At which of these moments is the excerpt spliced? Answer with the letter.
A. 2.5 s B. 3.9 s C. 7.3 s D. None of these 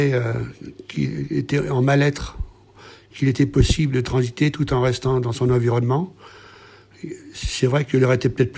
B